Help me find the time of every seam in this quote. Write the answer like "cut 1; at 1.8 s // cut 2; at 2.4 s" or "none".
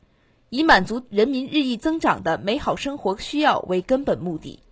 none